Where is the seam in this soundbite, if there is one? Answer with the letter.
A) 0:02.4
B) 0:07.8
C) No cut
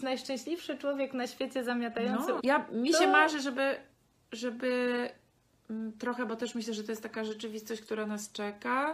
A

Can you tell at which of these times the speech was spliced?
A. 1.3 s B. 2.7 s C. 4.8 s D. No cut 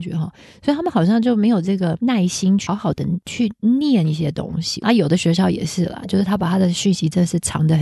B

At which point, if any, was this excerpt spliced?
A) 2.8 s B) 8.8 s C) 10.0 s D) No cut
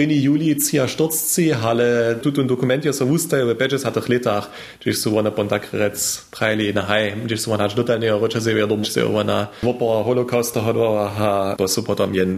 B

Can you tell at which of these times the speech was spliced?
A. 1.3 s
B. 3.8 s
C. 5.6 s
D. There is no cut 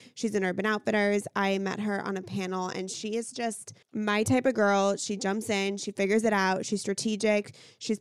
B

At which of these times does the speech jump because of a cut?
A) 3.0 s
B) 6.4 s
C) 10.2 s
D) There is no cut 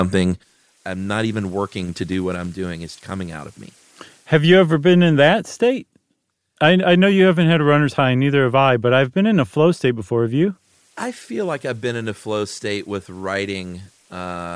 A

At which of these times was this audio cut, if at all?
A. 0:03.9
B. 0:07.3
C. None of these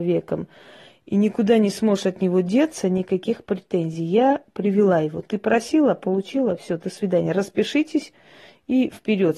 C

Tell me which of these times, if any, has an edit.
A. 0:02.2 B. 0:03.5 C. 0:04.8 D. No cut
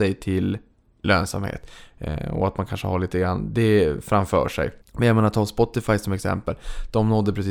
C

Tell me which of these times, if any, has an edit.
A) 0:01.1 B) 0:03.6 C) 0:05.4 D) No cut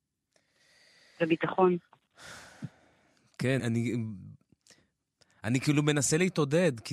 B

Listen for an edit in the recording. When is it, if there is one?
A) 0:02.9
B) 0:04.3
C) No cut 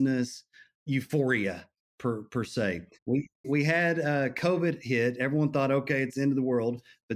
A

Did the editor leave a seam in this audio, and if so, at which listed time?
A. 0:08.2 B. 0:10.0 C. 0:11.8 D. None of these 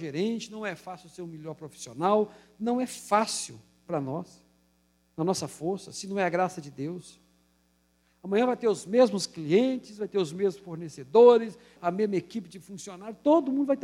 C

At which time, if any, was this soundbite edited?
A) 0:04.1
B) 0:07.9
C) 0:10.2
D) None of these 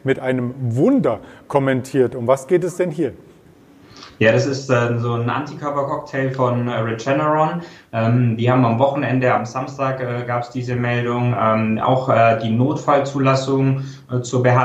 D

